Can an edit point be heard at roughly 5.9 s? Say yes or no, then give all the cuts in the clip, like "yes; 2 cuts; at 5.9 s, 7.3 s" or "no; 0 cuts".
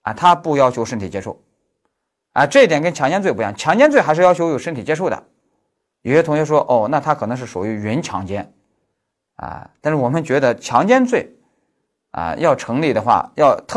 yes; 1 cut; at 5.9 s